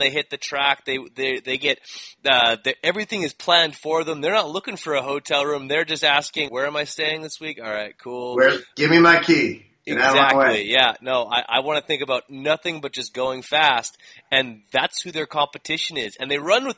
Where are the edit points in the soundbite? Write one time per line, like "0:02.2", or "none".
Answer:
0:06.5